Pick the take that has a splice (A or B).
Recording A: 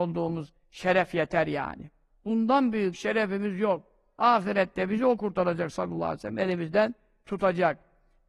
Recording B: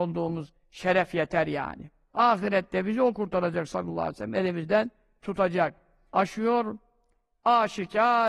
B